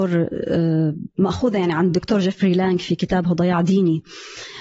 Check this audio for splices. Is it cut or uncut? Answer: uncut